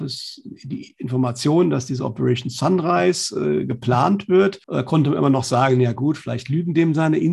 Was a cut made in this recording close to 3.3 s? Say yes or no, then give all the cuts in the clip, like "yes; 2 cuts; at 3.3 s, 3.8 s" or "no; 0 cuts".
no; 1 cut; at 4.6 s